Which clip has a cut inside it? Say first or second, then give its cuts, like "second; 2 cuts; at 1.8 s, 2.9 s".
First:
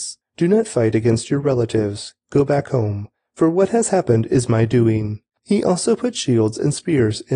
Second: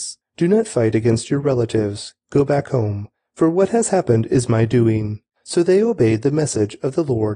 first; 1 cut; at 5.4 s